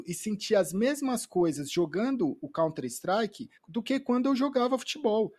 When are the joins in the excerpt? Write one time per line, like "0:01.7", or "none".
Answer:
0:03.6